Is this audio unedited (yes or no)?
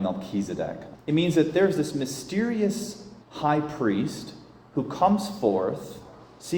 no